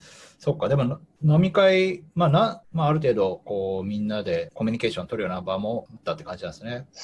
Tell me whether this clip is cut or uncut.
cut